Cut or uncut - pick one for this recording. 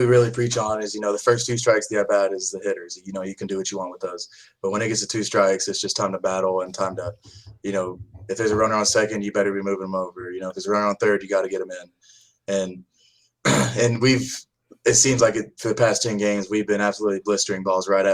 uncut